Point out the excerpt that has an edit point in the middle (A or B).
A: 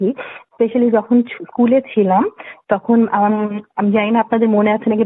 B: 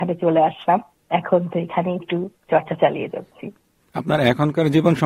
B